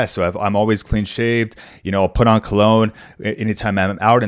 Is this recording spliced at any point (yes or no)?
no